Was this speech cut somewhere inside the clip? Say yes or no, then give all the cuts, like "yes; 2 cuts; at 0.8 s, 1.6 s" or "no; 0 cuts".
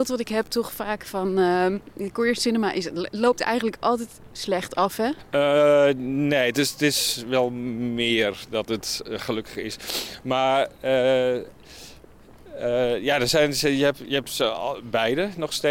no; 0 cuts